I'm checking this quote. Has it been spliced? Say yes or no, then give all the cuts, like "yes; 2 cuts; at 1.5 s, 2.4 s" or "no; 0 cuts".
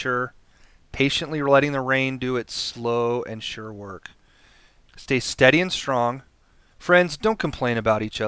yes; 2 cuts; at 4.9 s, 6.7 s